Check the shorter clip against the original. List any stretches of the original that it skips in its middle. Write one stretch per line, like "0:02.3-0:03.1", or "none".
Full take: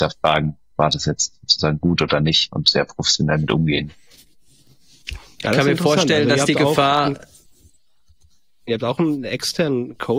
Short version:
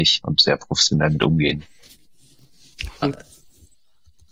0:05.3-0:07.0